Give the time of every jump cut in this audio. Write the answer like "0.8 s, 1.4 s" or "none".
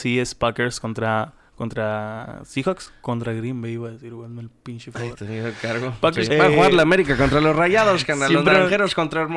6.3 s

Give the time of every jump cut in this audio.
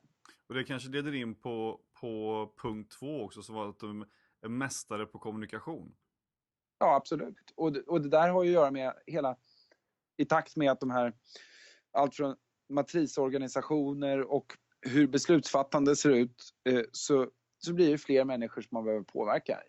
none

